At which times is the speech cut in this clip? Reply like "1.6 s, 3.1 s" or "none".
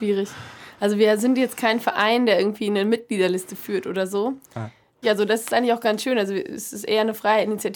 5.0 s

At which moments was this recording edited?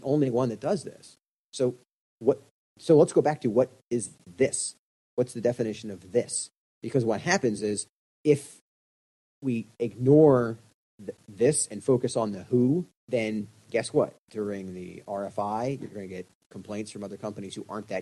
13.0 s

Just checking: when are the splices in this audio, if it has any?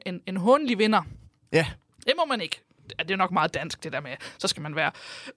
none

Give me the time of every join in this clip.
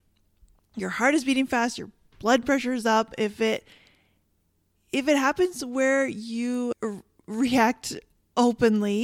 none

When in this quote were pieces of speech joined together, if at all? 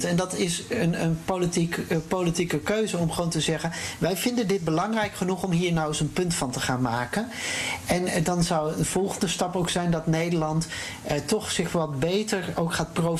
none

